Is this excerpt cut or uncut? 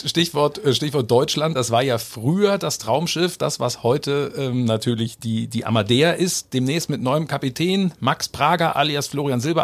uncut